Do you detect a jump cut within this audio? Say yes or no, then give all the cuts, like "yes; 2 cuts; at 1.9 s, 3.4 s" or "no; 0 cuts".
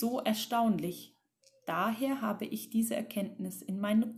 no; 0 cuts